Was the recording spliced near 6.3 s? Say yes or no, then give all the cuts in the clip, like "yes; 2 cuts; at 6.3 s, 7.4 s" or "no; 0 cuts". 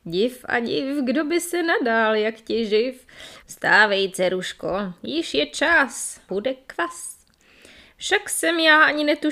yes; 2 cuts; at 3.4 s, 6.3 s